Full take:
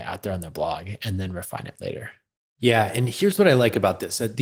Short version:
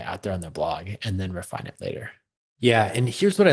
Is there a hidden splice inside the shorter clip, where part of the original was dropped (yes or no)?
no